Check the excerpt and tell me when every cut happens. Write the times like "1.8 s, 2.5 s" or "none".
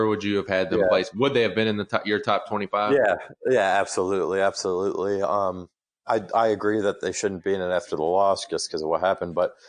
none